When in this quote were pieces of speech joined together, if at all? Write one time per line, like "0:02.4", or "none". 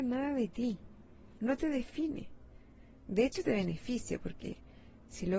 0:01.4